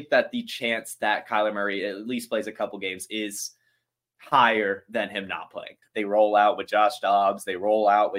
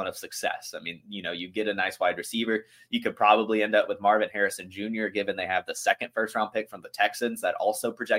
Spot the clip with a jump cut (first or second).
first